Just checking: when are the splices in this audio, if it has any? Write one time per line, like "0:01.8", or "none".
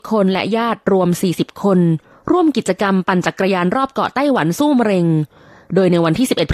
none